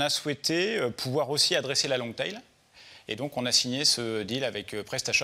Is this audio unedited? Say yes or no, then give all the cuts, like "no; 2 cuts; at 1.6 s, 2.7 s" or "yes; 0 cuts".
yes; 0 cuts